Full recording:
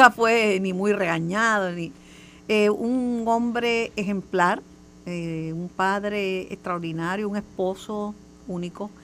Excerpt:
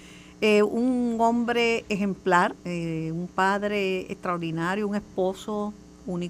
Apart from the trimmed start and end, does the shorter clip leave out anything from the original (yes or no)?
yes